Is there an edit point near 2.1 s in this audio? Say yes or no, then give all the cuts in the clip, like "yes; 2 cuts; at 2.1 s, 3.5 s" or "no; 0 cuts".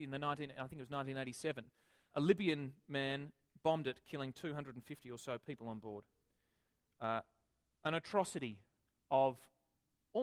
yes; 1 cut; at 2.1 s